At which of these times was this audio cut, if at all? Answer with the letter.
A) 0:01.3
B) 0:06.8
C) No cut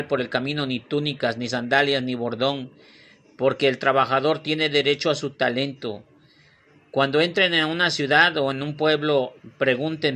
C